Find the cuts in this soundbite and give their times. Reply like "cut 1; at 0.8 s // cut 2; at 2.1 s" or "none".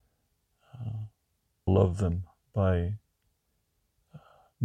cut 1; at 1.7 s